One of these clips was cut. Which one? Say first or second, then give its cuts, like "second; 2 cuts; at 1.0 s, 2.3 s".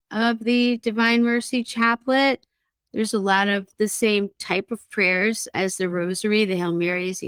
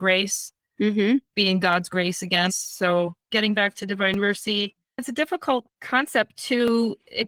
second; 1 cut; at 2.5 s